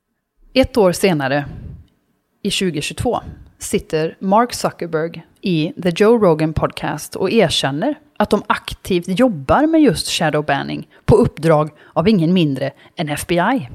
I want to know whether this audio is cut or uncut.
cut